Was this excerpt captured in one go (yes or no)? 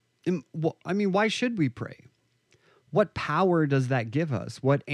yes